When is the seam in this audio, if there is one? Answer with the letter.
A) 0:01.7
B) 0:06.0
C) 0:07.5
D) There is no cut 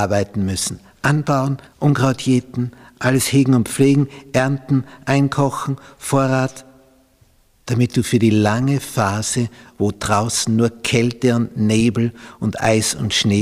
A